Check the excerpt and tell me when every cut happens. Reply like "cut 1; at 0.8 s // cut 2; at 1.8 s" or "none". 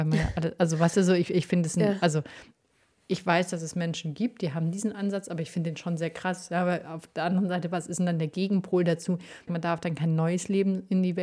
cut 1; at 9.5 s

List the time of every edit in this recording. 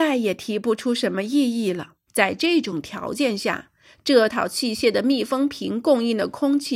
cut 1; at 2.1 s

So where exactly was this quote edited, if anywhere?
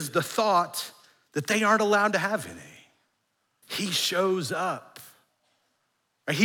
cut 1; at 3.6 s

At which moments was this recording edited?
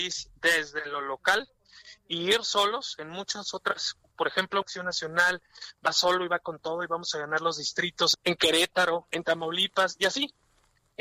cut 1; at 4.6 s // cut 2; at 8.1 s

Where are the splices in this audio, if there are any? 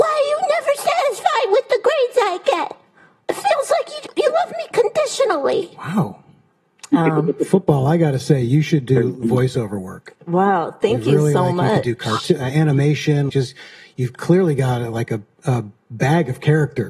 cut 1; at 13.3 s

